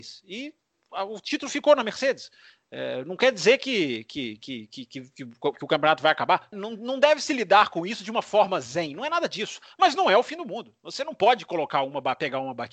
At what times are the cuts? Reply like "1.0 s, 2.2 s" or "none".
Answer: 6.5 s